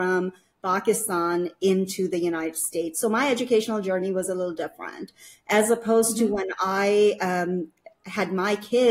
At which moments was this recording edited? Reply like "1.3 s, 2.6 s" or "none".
none